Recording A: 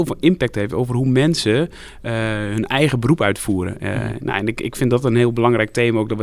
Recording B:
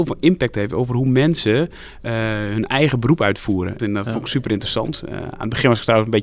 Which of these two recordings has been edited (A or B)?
B